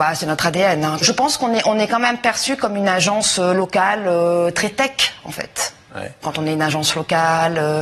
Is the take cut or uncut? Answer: cut